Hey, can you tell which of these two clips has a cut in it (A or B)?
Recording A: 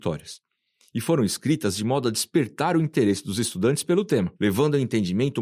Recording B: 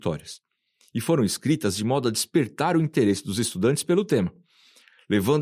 A